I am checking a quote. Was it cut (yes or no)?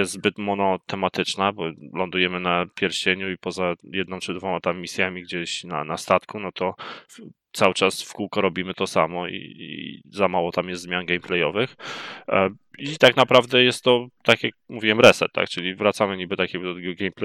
no